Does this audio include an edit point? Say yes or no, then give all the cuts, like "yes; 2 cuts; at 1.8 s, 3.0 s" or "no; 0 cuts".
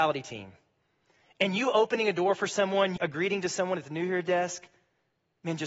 yes; 1 cut; at 3.0 s